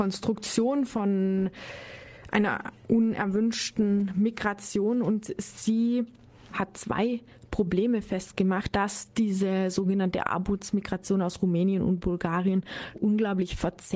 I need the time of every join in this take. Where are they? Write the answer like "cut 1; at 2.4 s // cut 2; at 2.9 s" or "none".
cut 1; at 8.7 s // cut 2; at 12.9 s